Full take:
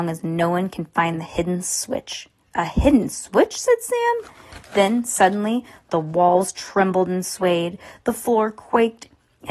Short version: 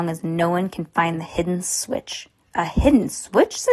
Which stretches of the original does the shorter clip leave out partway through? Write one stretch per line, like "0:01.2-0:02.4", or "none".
none